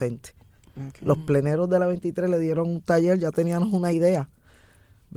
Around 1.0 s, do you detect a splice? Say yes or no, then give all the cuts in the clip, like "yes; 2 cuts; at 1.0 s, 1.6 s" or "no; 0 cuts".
no; 0 cuts